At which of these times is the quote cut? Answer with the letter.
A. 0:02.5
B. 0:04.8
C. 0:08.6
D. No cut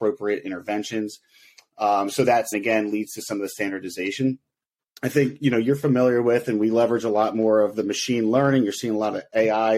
A